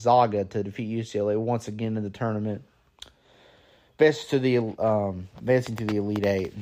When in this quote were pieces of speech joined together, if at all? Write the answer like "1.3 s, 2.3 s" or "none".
none